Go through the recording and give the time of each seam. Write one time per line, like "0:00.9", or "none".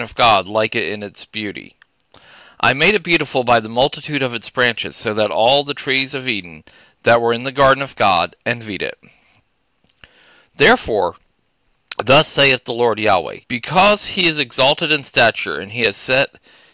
0:13.4

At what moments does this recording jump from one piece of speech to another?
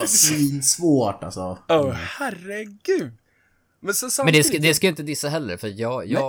none

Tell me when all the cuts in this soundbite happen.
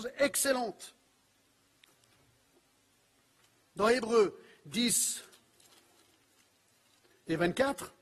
none

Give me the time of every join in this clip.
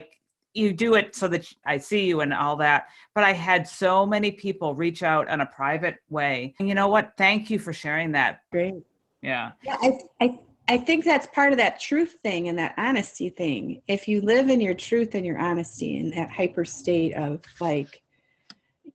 0:01.6
0:06.6
0:08.5

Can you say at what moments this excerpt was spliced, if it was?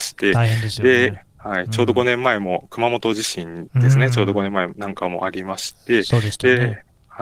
none

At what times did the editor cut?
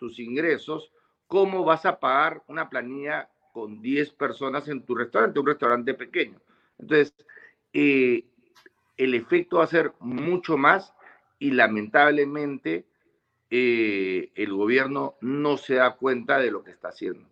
none

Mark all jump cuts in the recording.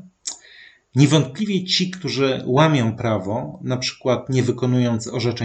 none

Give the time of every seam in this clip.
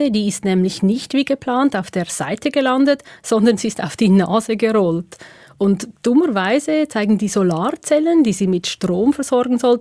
none

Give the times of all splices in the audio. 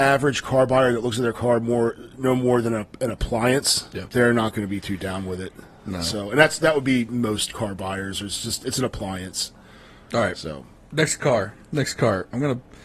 0:11.6

